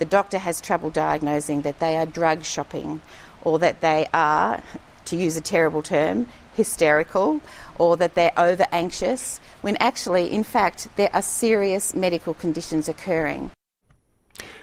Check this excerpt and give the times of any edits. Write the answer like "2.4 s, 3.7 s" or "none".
none